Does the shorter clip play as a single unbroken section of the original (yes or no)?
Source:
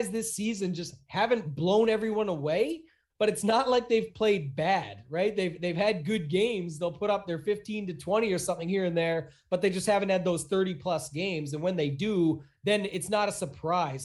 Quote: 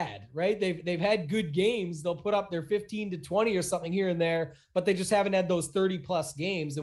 yes